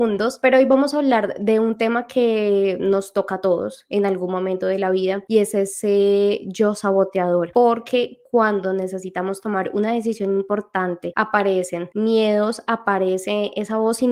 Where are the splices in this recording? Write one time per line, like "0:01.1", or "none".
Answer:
0:07.5